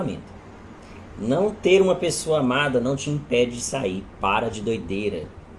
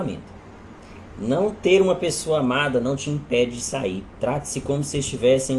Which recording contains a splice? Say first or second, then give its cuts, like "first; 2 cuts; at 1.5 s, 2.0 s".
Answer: second; 1 cut; at 4.2 s